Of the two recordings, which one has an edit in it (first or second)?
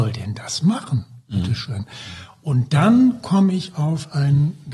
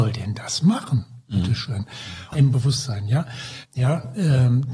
second